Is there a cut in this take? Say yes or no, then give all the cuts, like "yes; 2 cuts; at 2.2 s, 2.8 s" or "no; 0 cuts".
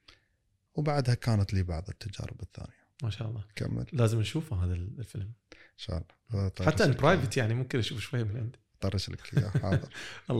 yes; 1 cut; at 2.9 s